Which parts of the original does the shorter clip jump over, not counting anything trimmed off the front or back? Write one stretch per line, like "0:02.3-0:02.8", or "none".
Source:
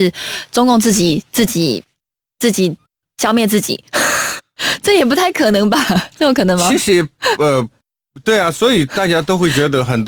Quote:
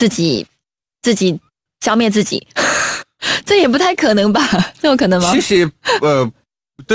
none